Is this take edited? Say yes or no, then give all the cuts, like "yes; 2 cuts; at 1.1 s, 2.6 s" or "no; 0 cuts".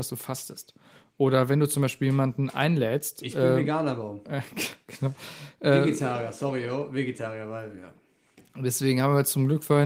no; 0 cuts